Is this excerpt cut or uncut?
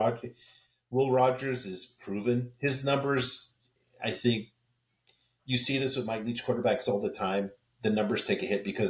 uncut